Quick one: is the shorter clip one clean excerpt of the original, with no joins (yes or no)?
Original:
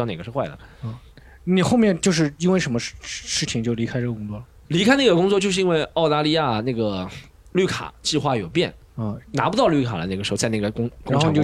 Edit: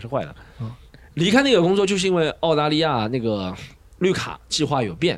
no